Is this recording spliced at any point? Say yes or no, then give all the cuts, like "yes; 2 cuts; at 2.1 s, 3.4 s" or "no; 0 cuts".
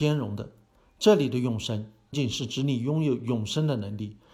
yes; 1 cut; at 2.1 s